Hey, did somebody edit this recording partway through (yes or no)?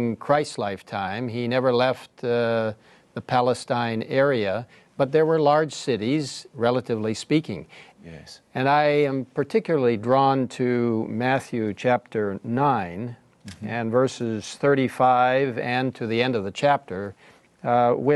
yes